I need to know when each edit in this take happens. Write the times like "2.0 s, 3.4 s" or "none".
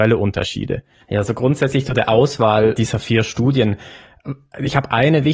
1.0 s, 2.7 s